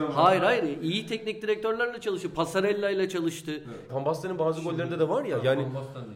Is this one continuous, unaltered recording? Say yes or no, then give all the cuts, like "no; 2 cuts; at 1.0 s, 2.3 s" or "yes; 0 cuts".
no; 1 cut; at 3.9 s